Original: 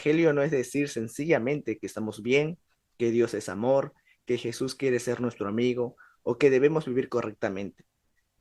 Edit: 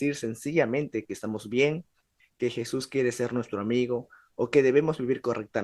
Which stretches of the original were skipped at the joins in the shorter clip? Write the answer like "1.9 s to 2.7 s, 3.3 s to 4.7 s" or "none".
2.9 s to 4.1 s